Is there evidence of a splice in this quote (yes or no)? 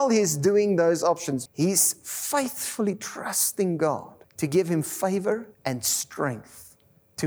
yes